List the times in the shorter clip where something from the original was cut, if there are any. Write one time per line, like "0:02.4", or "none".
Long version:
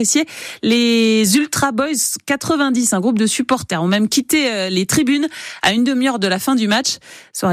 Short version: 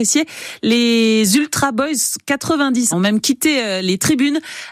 0:02.9